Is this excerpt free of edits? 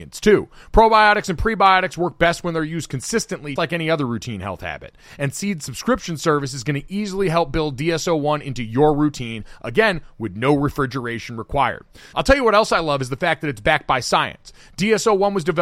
no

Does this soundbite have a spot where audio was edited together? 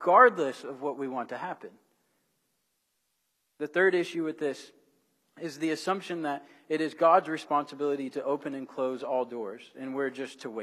no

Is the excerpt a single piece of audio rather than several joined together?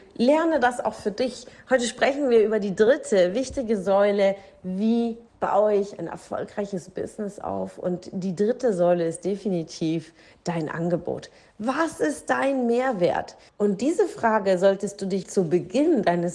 no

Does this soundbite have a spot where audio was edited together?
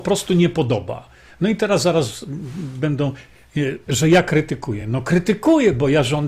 no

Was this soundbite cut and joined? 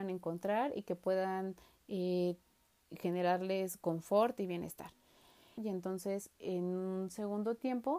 yes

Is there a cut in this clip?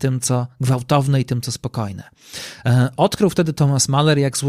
no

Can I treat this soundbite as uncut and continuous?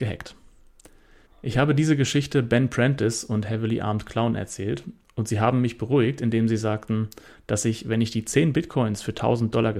no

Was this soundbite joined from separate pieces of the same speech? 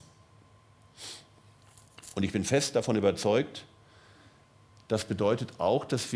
no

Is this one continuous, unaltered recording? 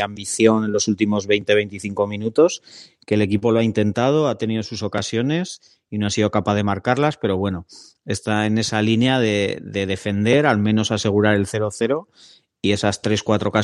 yes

